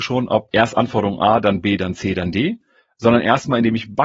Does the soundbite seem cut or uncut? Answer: uncut